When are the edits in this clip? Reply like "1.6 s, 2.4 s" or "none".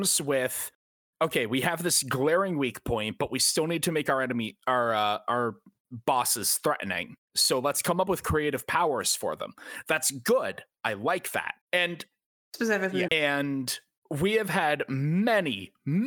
11.6 s, 13.1 s